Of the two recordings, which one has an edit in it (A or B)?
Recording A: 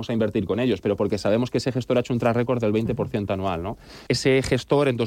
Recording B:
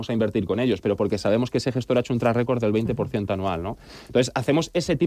A